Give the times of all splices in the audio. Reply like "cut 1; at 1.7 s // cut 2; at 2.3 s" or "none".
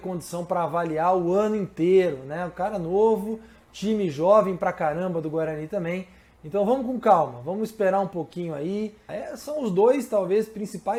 cut 1; at 9.1 s

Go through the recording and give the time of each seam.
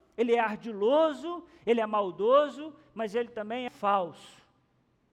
cut 1; at 3.7 s

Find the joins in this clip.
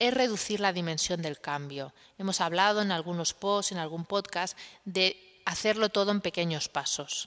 none

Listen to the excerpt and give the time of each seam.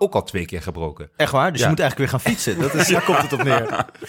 cut 1; at 2.9 s

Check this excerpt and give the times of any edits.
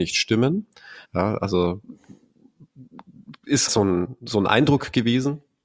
cut 1; at 1.0 s // cut 2; at 3.7 s

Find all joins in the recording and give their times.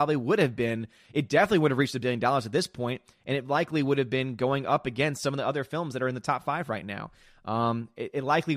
none

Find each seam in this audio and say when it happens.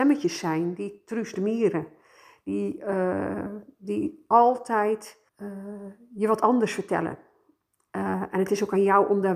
cut 1; at 5.3 s // cut 2; at 7.9 s

